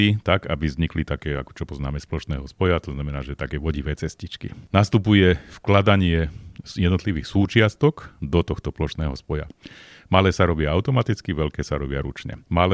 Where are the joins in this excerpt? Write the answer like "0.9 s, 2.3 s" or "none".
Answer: none